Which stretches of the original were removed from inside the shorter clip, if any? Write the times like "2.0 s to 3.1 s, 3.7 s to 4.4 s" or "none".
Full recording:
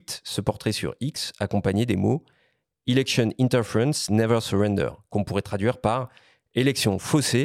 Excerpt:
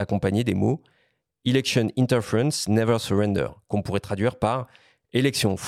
none